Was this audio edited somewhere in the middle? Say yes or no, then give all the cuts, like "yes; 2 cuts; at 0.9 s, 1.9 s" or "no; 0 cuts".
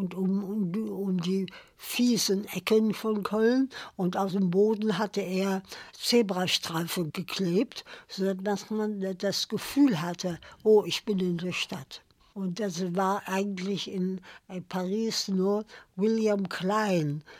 yes; 1 cut; at 12.3 s